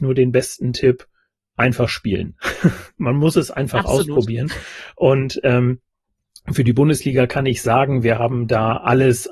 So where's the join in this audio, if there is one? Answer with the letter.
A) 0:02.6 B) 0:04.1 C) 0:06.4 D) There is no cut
D